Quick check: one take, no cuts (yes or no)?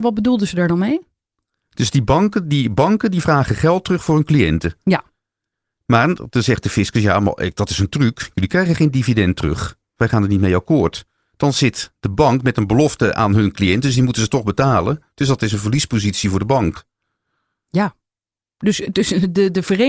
yes